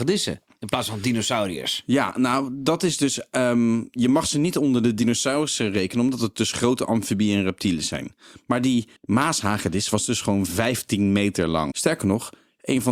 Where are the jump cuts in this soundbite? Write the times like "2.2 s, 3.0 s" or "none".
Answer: 9.0 s, 11.7 s